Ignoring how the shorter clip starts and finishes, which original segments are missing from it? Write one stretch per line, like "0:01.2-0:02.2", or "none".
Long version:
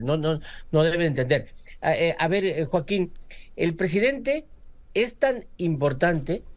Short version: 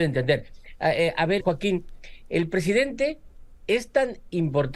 0:02.4-0:02.7